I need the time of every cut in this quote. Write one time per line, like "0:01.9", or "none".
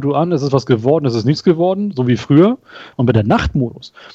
0:02.9